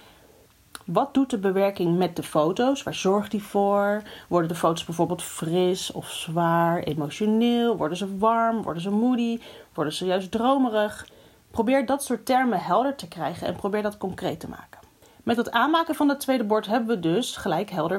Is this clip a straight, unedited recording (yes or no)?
yes